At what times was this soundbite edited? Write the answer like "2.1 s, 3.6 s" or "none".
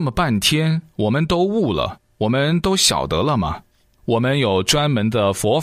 4.0 s